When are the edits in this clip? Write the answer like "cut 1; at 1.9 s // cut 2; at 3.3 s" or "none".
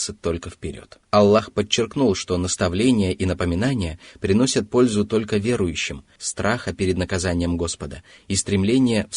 cut 1; at 1.0 s // cut 2; at 6.2 s